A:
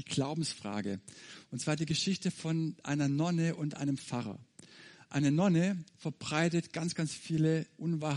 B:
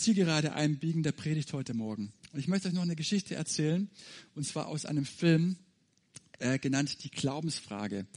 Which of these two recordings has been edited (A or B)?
A